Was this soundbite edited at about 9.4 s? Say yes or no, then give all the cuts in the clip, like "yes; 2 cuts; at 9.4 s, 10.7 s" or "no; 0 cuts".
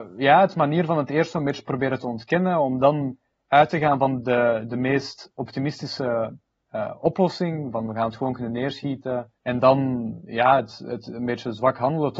yes; 1 cut; at 9.4 s